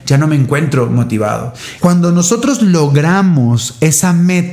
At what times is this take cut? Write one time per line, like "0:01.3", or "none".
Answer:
0:01.8